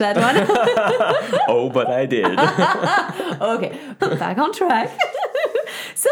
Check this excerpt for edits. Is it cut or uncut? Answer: cut